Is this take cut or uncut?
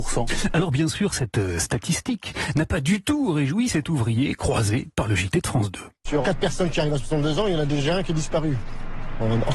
cut